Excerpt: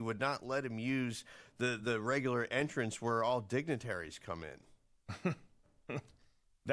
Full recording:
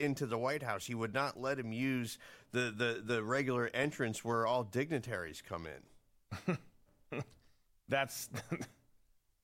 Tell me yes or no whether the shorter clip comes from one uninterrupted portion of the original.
no